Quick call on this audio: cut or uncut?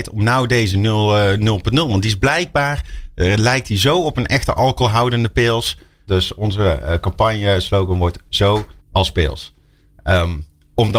cut